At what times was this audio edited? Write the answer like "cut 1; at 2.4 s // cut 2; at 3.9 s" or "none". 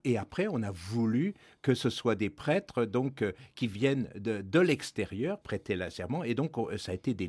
cut 1; at 5.4 s